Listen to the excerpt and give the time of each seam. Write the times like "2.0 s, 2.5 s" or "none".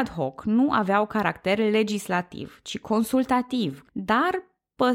3.9 s